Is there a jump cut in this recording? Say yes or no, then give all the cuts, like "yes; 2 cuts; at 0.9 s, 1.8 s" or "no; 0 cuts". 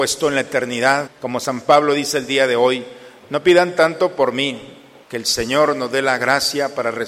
yes; 2 cuts; at 1.1 s, 5.0 s